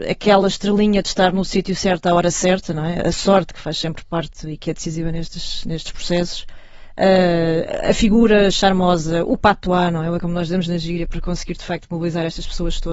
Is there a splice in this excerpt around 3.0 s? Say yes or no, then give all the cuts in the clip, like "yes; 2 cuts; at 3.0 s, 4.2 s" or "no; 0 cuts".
no; 1 cut; at 10.2 s